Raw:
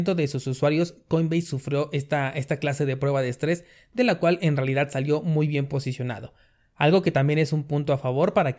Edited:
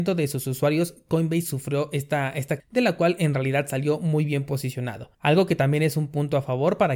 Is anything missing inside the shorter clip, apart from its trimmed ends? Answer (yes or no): yes